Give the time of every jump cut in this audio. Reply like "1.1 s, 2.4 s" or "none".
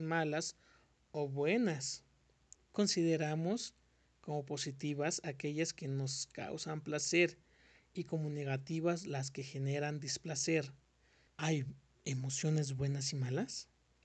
2.5 s, 11.3 s